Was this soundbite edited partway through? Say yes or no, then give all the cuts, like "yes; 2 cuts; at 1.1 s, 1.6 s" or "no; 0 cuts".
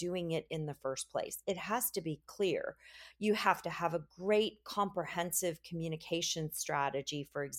no; 0 cuts